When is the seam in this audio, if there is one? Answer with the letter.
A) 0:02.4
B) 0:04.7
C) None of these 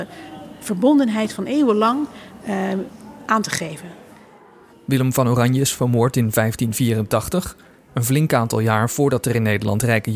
B